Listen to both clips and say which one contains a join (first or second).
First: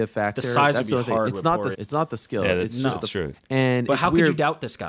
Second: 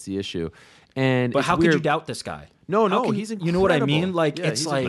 first